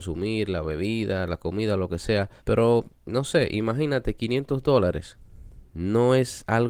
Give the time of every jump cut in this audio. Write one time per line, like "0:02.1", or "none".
0:02.4